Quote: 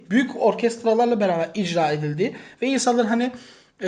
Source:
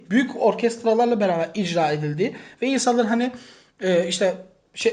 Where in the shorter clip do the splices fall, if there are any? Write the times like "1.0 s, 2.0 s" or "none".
none